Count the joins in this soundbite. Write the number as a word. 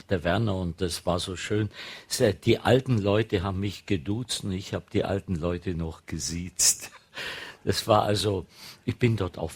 zero